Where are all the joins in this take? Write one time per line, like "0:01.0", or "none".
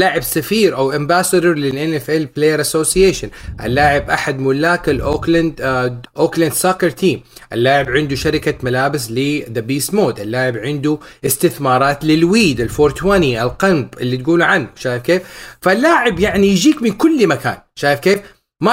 0:06.0